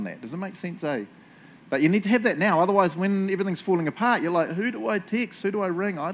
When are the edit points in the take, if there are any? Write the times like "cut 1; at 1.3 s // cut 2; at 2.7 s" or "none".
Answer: none